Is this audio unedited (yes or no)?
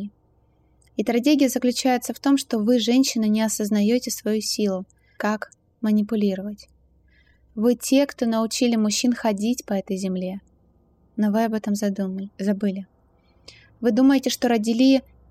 no